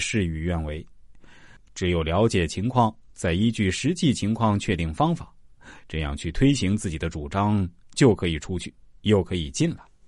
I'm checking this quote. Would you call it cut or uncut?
cut